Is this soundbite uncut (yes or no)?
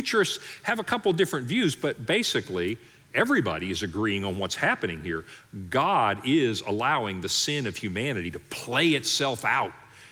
yes